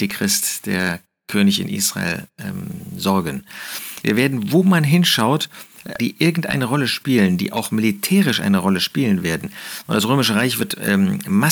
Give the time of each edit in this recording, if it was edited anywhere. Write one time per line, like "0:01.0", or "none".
0:04.0
0:06.0